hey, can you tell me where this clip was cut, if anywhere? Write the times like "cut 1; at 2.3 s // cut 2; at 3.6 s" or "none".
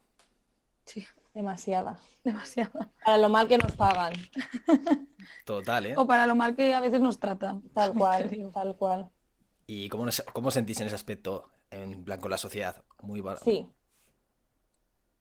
cut 1; at 12.8 s